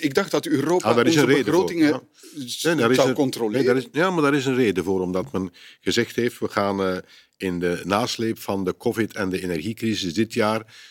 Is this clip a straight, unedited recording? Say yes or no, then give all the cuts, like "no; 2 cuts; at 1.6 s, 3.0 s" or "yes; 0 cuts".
yes; 0 cuts